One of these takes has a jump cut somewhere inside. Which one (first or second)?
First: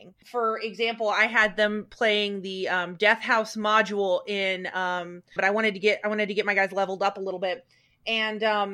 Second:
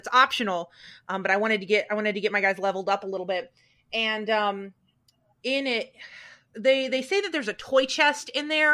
first